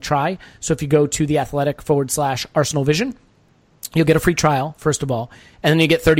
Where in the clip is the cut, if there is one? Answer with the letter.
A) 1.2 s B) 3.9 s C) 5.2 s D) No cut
D